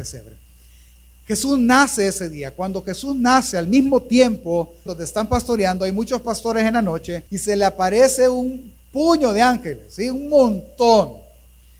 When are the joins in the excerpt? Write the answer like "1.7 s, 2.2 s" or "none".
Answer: 4.9 s, 7.3 s